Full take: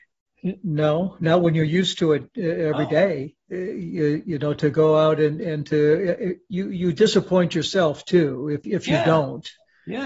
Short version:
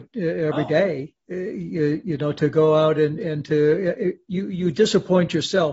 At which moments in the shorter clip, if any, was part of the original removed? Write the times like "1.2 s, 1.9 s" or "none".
none